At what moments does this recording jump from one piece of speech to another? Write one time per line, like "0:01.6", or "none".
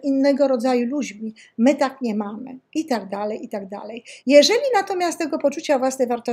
0:04.2